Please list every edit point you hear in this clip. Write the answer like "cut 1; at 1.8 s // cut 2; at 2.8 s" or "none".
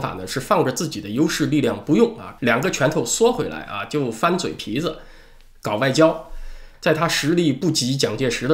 cut 1; at 2.4 s // cut 2; at 6.7 s